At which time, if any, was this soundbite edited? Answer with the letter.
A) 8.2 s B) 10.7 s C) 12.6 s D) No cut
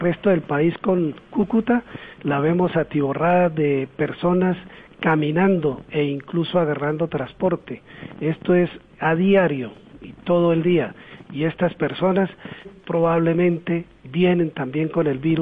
C